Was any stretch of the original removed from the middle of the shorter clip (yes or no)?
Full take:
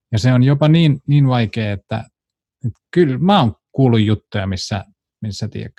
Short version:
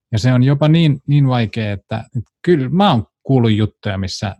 yes